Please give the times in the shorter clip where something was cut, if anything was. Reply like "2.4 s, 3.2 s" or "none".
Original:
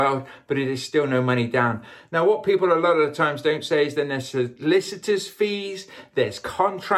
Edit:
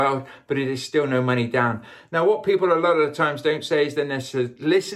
none